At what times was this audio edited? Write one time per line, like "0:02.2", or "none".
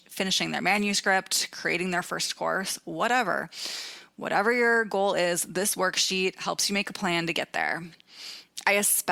none